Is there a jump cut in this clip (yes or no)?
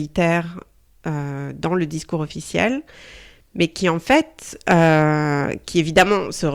no